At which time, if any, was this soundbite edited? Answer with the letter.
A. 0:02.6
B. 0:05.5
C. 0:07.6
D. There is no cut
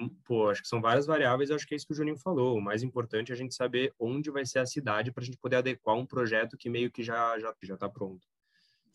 C